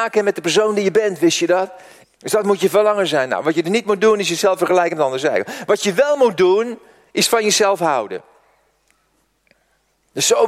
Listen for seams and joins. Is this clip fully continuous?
no; 1 cut; at 2.0 s

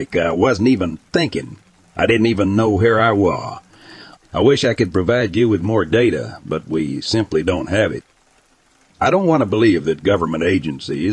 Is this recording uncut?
no; 1 cut; at 4.1 s

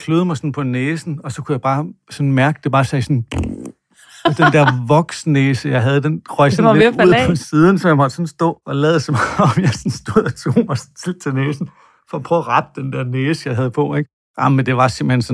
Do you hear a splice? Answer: no; 0 cuts

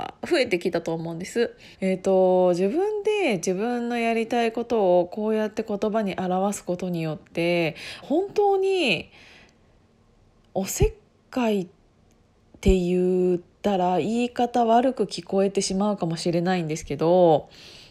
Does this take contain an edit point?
yes; 2 cuts; at 1.7 s, 8.0 s

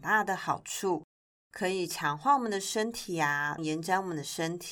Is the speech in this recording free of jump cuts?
no; 1 cut; at 3.6 s

